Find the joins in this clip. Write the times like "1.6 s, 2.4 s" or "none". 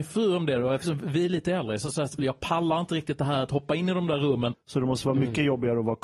2.2 s, 4.5 s

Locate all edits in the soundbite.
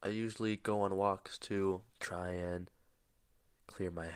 1.9 s

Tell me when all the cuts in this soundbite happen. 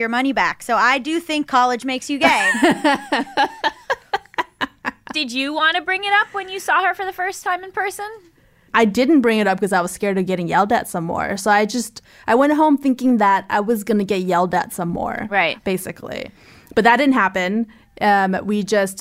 none

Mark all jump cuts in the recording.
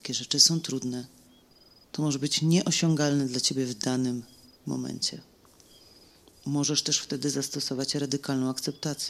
none

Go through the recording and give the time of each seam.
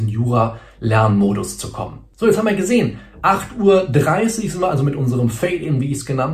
none

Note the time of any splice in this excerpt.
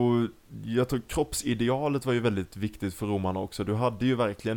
none

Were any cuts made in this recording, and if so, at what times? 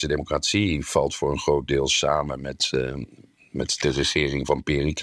none

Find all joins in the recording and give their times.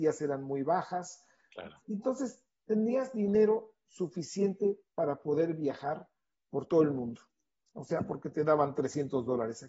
none

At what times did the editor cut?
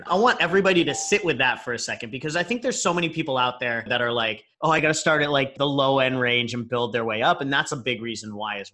none

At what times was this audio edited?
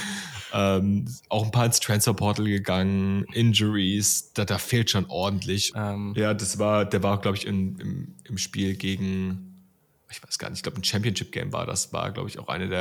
5.7 s

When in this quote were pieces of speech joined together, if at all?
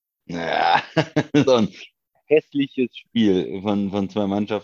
1.5 s

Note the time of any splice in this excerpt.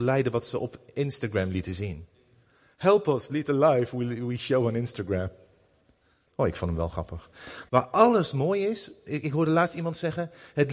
7.7 s

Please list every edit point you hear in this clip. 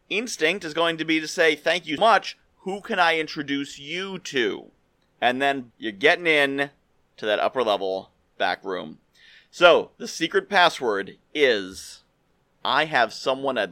2.0 s, 5.7 s

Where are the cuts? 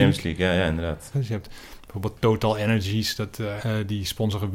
1.1 s, 3.6 s

